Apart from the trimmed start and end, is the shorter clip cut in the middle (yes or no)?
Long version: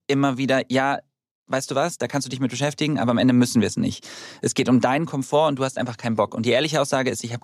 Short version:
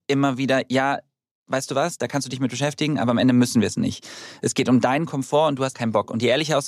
yes